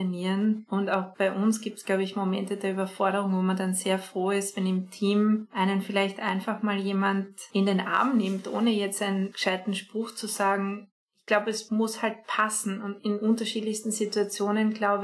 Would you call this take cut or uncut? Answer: uncut